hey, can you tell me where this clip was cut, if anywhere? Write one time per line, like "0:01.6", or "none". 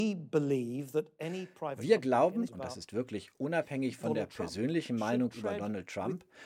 0:02.5